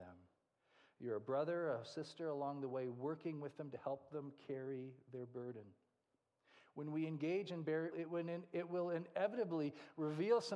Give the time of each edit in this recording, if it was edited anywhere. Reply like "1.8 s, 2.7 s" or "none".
7.9 s